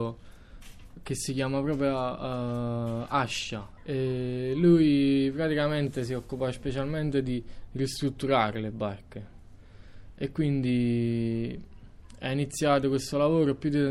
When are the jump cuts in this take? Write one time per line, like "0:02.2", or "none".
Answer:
0:03.8